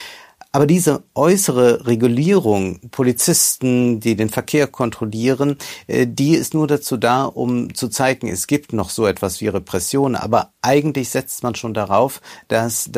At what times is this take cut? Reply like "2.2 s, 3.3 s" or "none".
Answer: 2.9 s

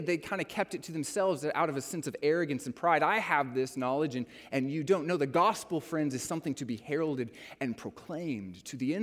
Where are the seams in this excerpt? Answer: none

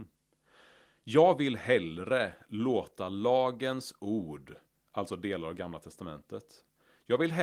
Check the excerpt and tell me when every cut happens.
none

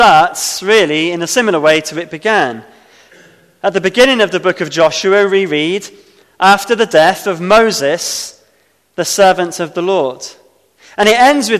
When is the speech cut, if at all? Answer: none

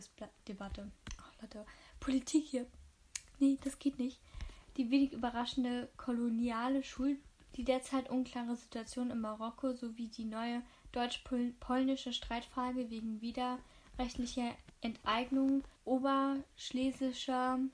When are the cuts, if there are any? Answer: 7.5 s, 15.8 s

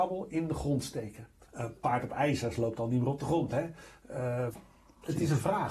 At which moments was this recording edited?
1.5 s, 4.5 s

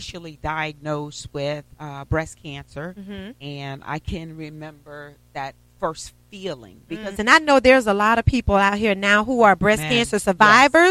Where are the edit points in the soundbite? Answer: 1.7 s, 7.1 s

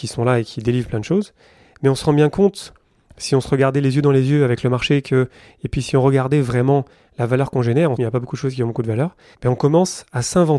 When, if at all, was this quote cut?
7.9 s, 9.3 s

